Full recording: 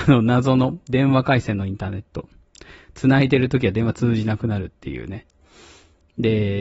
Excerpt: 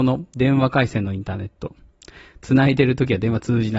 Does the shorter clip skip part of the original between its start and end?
no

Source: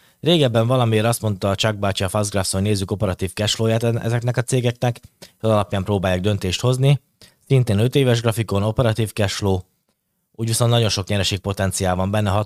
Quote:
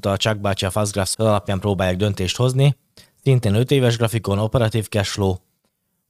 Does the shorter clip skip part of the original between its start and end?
yes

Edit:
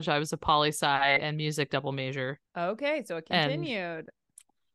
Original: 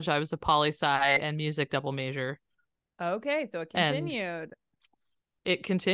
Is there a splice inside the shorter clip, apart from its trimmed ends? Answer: yes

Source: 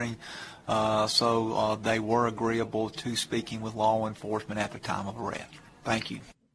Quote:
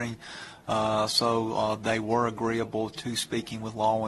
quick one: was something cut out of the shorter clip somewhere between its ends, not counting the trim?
no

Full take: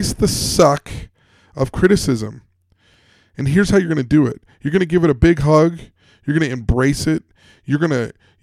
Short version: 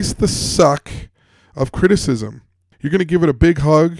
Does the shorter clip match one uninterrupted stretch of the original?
no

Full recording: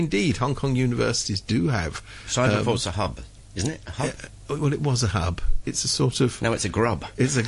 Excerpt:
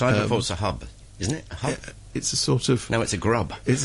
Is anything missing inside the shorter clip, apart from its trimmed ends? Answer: yes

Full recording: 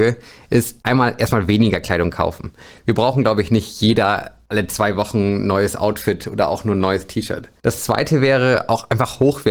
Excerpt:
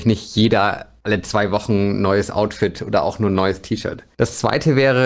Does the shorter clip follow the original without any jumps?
yes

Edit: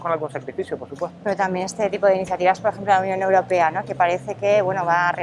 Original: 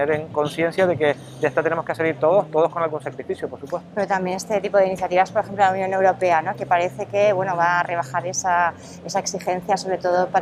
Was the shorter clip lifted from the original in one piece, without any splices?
yes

